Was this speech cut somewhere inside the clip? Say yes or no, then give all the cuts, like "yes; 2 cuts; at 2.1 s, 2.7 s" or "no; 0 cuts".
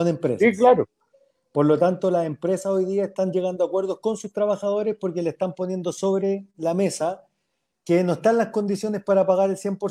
no; 0 cuts